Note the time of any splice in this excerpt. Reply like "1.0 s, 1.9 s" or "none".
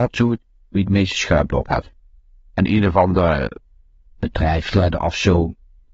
2.5 s